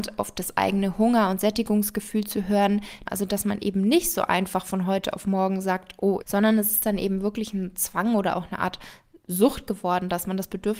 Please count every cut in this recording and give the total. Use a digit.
2